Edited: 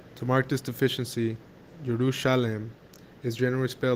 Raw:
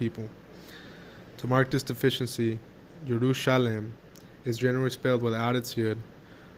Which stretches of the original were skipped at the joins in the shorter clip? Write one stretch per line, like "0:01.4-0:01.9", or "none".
none